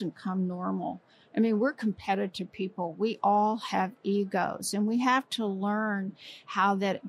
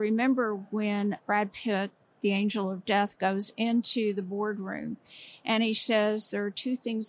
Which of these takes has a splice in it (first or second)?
second